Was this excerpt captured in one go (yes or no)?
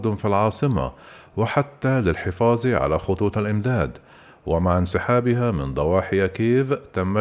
yes